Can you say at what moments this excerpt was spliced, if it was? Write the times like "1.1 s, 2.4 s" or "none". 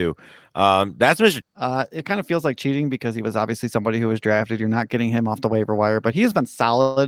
1.4 s